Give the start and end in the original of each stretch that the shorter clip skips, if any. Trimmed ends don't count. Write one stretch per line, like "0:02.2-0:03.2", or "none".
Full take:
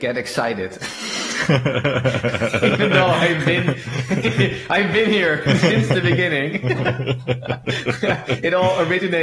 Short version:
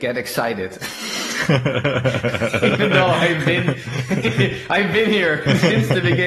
none